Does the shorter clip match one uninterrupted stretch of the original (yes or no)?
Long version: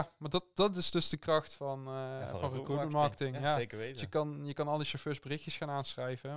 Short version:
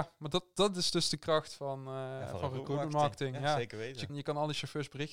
no